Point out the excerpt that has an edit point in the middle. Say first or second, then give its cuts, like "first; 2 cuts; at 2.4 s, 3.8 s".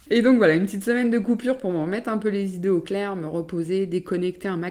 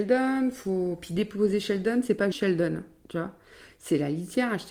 second; 1 cut; at 2.3 s